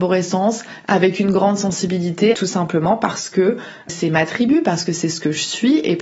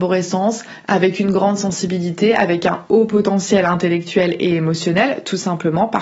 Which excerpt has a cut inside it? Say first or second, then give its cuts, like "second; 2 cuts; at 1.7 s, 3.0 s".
first; 2 cuts; at 2.3 s, 3.9 s